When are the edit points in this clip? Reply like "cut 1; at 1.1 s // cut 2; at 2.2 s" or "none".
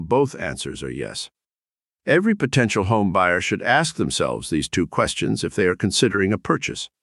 cut 1; at 1.8 s